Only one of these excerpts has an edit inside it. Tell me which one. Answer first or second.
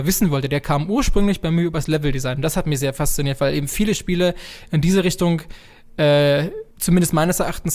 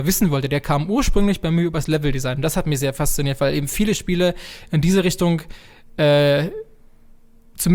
first